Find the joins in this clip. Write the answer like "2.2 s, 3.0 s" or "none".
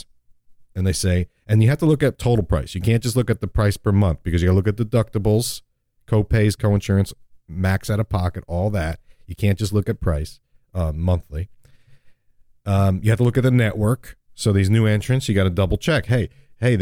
none